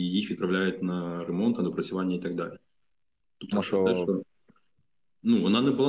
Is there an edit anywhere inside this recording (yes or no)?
yes